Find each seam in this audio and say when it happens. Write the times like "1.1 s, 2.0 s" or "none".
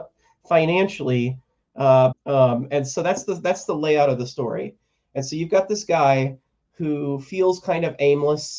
2.1 s